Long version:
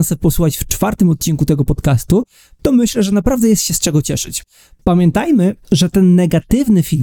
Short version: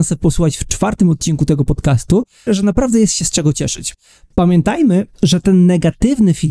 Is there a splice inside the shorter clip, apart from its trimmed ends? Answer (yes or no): yes